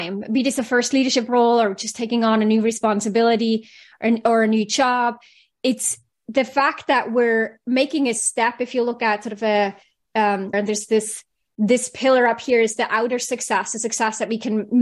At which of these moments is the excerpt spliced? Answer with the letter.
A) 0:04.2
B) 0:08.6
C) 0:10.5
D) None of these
C